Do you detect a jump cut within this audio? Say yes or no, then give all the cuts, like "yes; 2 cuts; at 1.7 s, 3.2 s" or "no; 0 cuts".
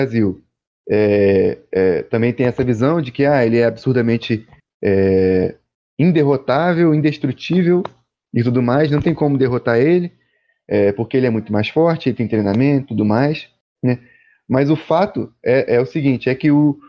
no; 0 cuts